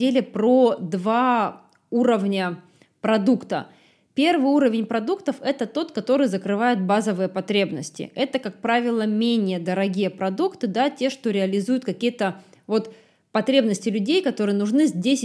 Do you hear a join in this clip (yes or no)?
no